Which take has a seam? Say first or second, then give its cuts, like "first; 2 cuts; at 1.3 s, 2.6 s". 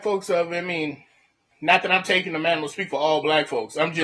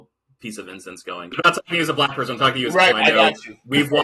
second; 2 cuts; at 1.3 s, 2.9 s